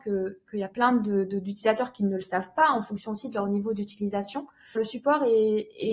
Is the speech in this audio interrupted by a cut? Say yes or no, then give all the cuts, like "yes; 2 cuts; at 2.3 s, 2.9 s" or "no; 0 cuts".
yes; 1 cut; at 4.7 s